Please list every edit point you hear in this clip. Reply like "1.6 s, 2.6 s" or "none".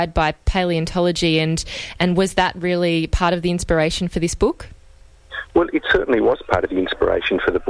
none